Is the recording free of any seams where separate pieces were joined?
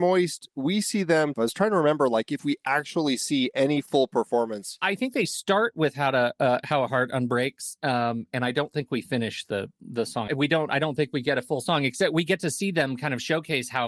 no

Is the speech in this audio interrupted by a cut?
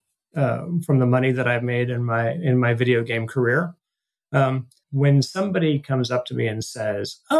yes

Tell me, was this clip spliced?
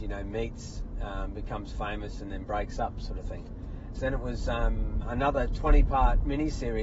yes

